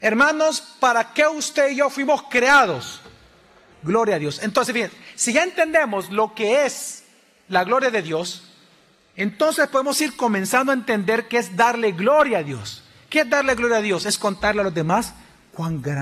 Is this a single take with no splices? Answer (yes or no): no